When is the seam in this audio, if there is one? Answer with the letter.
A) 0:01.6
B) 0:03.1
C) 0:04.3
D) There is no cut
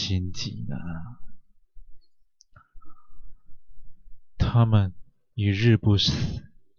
D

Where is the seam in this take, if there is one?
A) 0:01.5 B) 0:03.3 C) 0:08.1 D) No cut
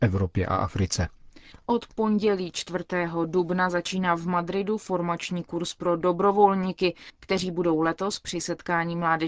A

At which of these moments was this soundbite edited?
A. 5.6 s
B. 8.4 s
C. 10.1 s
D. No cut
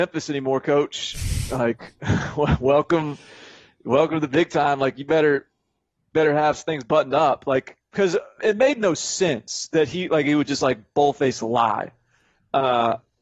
B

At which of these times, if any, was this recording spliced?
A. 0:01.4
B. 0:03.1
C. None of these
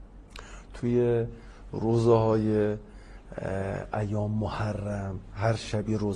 C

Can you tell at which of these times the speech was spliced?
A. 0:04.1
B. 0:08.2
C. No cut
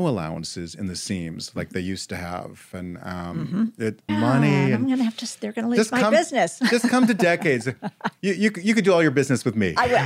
A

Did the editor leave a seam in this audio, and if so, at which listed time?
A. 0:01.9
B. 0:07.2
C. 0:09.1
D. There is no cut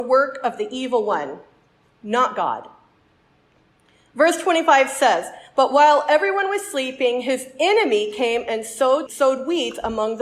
C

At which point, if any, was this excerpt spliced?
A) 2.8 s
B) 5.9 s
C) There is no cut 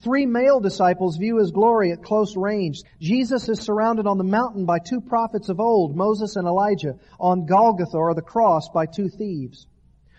A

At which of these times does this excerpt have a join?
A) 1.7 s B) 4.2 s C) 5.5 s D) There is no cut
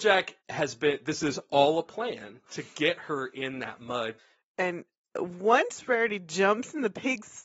D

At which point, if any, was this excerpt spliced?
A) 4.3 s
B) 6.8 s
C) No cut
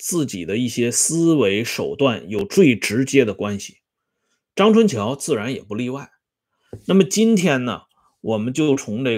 C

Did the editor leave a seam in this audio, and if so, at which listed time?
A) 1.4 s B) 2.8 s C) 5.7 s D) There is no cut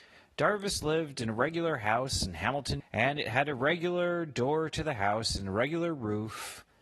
B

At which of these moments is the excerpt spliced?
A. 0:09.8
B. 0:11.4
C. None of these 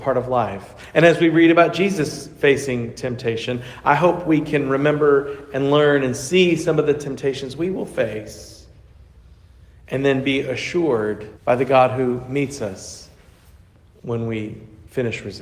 B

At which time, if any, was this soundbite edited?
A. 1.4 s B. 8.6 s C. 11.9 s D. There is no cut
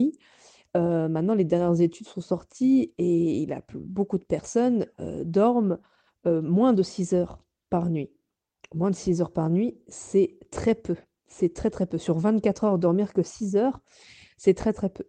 D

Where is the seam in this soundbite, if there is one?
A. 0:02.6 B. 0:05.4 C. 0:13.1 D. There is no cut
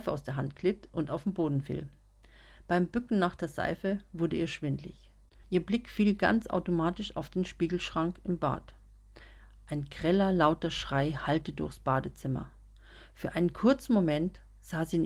B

